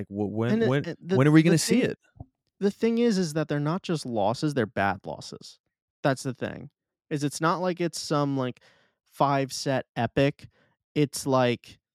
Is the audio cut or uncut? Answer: uncut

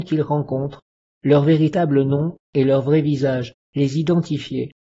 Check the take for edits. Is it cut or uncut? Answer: uncut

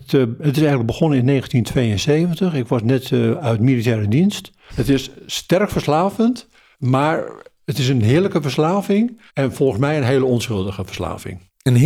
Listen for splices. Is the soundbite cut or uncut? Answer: cut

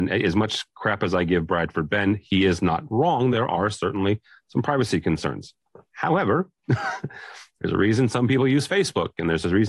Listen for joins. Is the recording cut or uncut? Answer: uncut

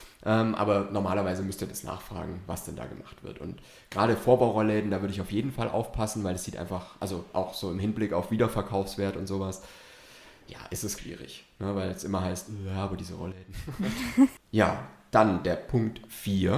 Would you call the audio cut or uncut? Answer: cut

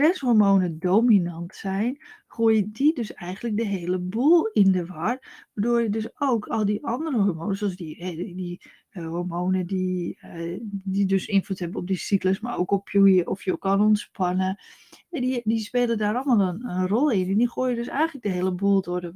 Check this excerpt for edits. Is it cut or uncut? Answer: uncut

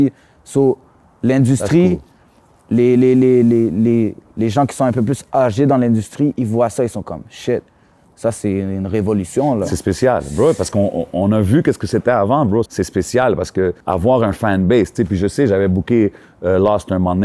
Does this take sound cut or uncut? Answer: cut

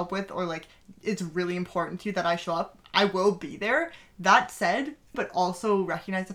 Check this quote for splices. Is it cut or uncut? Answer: cut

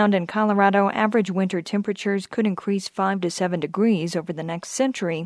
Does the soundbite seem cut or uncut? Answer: uncut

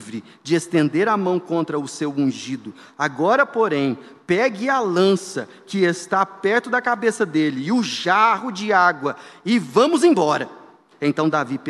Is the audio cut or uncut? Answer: uncut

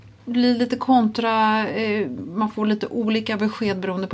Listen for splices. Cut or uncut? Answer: uncut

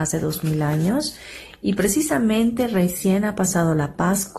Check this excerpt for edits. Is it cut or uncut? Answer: uncut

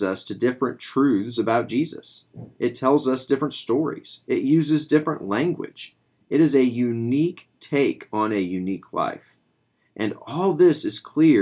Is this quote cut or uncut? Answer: uncut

